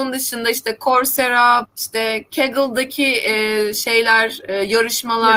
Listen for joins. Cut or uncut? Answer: cut